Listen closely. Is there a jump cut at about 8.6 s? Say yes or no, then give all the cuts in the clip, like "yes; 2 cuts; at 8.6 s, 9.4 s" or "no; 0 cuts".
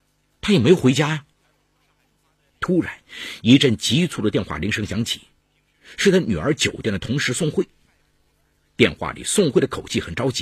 no; 1 cut; at 2.5 s